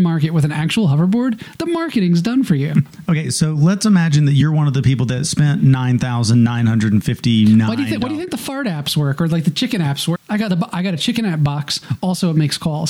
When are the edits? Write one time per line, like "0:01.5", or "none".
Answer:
0:10.2